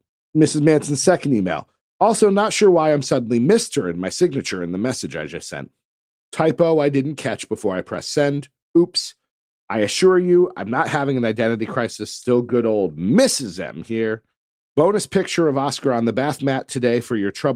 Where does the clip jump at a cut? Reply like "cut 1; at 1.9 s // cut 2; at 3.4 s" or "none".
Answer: none